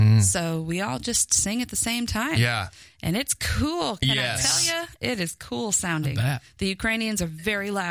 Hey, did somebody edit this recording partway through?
no; 0 cuts

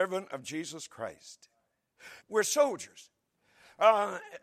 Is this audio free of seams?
no; 1 cut; at 2.2 s

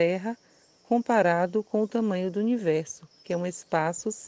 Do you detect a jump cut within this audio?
no; 0 cuts

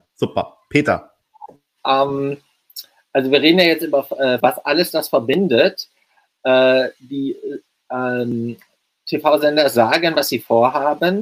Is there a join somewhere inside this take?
yes; 1 cut; at 4.4 s

